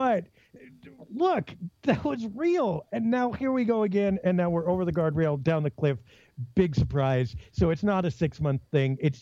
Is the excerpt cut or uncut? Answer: uncut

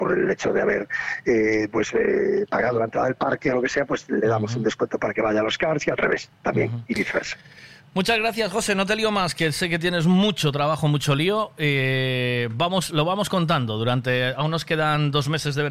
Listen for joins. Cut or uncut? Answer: uncut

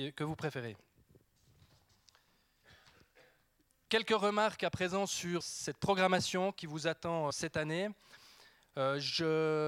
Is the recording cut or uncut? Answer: cut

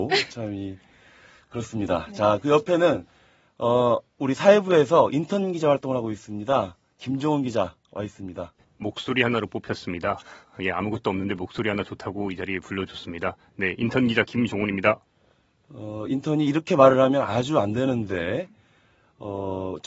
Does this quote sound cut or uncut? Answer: cut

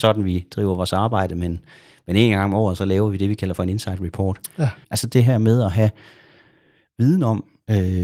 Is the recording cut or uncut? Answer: cut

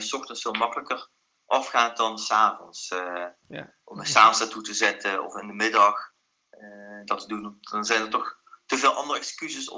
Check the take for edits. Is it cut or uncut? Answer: uncut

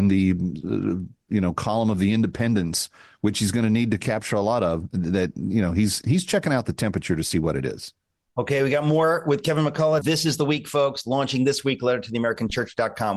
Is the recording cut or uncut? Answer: cut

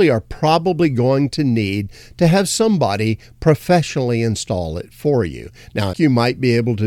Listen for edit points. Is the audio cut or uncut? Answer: cut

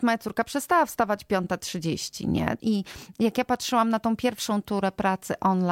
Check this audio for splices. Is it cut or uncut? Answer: cut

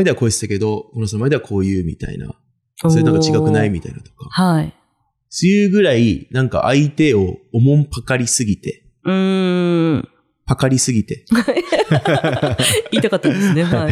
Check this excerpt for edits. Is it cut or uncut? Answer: uncut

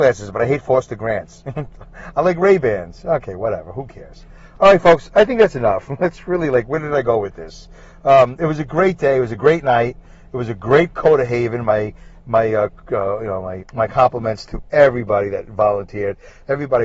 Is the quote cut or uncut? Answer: cut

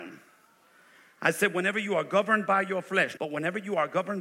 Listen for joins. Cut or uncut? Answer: cut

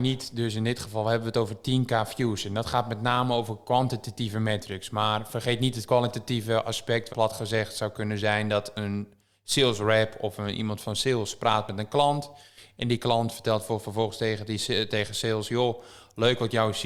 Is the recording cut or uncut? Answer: cut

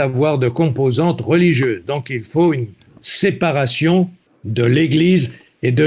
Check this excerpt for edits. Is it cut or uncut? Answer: uncut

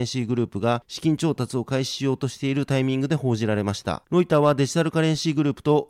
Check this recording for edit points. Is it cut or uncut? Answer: cut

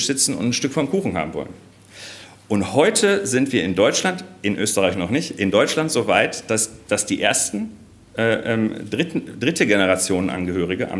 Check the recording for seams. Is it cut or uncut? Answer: uncut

